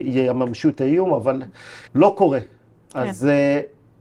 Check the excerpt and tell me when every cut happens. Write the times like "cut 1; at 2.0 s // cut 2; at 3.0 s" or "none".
cut 1; at 1.9 s